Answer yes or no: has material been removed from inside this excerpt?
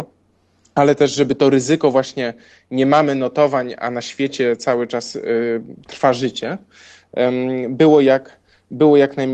no